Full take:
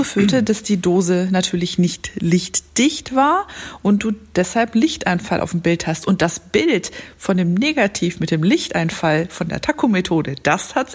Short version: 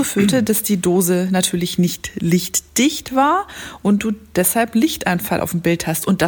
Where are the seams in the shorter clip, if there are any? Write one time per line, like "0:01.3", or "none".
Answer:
none